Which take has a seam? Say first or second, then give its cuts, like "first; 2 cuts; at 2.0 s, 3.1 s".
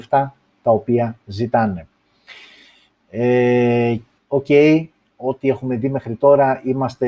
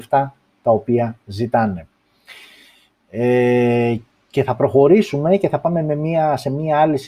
first; 1 cut; at 4.2 s